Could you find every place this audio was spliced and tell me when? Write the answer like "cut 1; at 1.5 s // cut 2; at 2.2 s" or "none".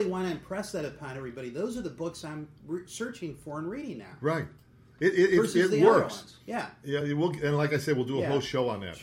none

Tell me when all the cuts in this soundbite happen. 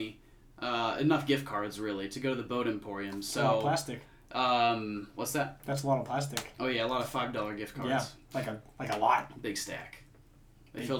none

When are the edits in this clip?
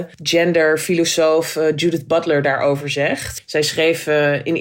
none

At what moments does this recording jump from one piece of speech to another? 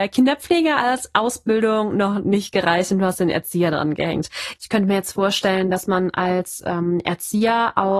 cut 1; at 4.5 s

